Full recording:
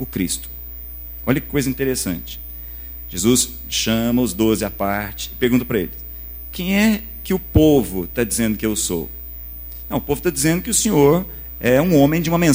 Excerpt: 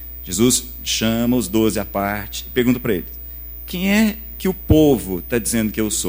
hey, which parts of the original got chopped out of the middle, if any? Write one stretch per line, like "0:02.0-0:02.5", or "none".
none